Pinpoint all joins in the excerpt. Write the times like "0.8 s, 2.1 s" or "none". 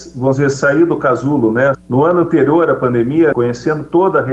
1.7 s, 3.3 s